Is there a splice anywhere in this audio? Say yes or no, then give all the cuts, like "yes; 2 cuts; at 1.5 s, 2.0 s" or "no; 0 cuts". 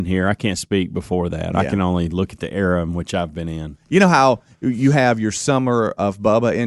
no; 0 cuts